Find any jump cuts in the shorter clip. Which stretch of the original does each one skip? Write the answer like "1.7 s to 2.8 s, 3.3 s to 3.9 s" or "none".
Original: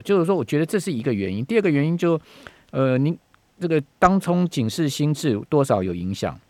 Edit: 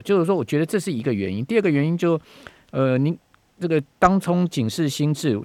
none